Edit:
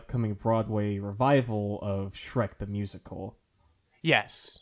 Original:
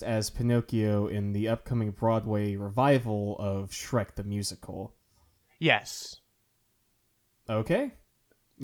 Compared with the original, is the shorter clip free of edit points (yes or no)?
yes